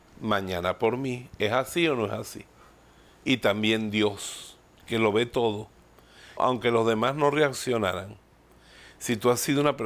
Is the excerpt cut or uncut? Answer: cut